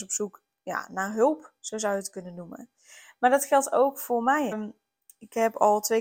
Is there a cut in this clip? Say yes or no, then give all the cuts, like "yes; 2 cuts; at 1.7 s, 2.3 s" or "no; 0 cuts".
yes; 1 cut; at 4.5 s